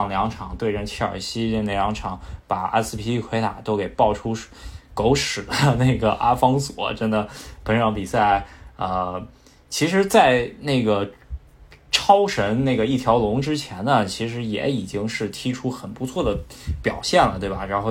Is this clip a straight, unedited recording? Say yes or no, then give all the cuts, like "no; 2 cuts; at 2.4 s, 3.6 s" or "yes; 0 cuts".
yes; 0 cuts